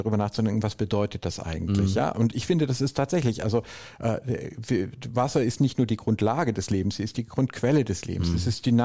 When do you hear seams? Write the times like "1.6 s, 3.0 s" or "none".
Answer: none